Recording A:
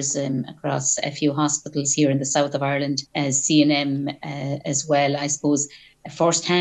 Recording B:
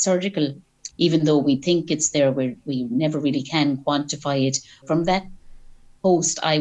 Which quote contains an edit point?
B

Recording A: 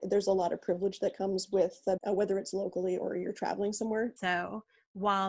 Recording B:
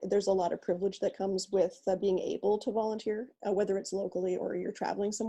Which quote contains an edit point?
A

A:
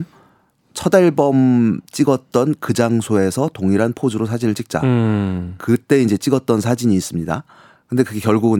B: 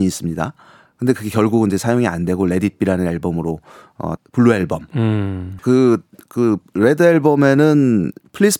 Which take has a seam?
B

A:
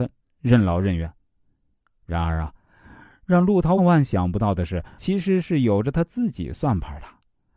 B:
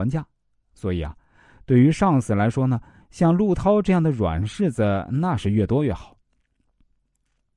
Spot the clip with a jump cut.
A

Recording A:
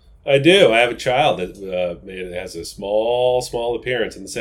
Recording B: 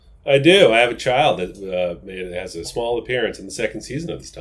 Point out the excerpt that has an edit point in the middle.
B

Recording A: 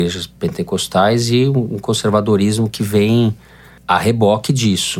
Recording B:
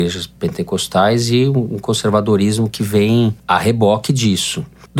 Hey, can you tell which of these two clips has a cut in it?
B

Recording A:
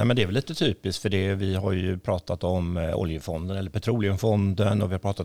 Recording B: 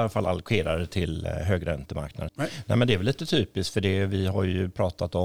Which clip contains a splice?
B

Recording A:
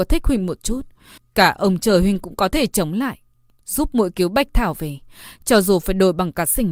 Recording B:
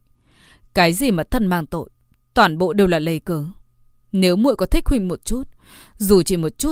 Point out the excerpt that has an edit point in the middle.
A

